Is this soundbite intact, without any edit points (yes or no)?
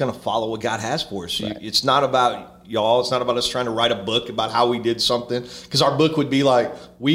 yes